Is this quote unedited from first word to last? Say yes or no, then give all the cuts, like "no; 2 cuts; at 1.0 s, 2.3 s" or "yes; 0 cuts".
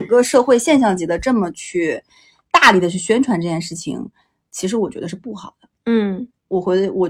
yes; 0 cuts